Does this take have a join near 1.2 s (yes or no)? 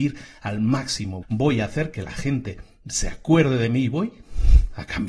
yes